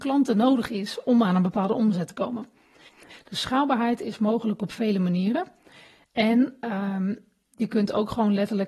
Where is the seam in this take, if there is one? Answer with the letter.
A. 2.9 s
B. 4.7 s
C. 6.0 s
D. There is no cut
A